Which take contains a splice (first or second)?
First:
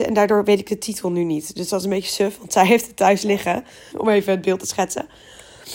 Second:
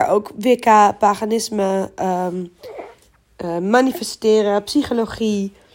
first